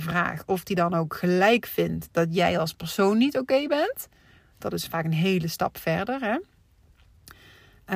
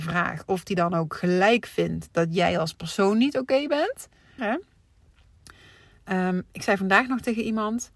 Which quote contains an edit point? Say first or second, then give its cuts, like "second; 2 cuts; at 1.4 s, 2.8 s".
second; 1 cut; at 4.4 s